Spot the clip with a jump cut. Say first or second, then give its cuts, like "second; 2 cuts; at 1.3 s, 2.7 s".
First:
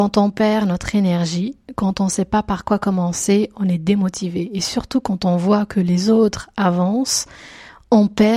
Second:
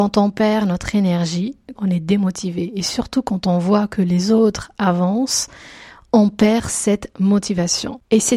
second; 1 cut; at 1.8 s